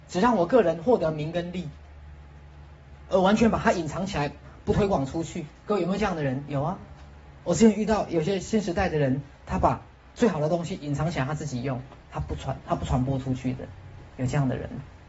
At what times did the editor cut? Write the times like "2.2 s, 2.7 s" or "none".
none